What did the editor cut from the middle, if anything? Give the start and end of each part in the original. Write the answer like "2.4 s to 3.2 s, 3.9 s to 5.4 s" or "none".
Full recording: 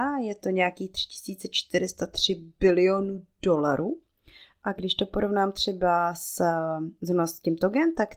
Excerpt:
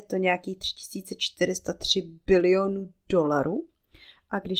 none